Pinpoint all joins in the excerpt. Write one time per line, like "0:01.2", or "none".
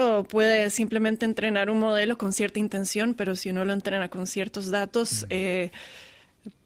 none